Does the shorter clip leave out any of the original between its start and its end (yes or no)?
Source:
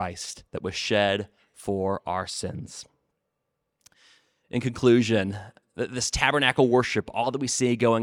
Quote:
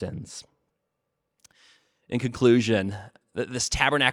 no